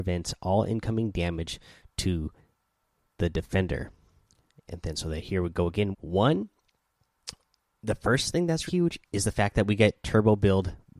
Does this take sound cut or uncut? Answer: cut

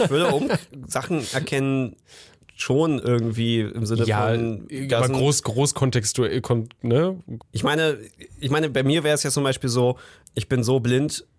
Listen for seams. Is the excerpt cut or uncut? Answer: cut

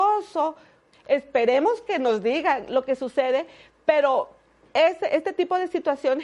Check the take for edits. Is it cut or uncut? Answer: cut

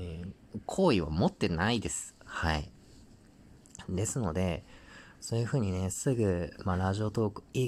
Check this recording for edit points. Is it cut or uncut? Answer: uncut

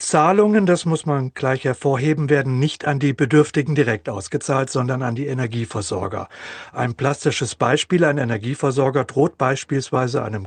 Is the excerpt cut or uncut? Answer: uncut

